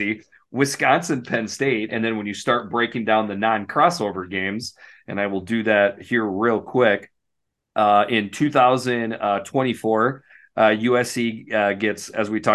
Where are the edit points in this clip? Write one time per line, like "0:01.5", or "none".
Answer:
none